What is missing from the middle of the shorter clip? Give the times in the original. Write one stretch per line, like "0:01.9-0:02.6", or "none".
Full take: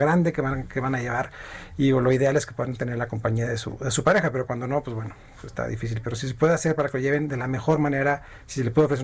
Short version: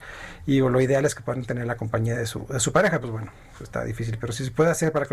0:04.3-0:04.8